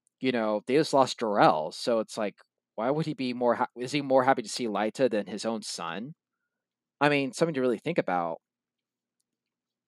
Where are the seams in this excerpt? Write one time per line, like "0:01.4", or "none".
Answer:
none